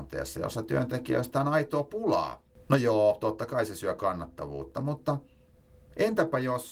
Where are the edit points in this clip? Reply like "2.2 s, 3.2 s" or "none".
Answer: none